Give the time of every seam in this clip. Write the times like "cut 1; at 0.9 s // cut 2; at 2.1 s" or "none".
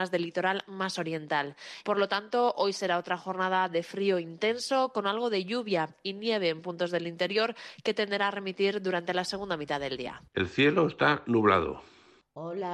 cut 1; at 1.8 s // cut 2; at 10.3 s